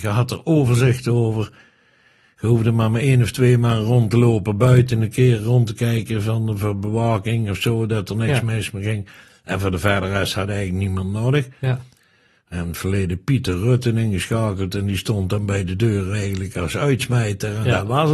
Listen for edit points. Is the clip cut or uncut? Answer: uncut